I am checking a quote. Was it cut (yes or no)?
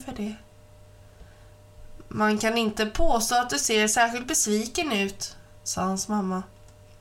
no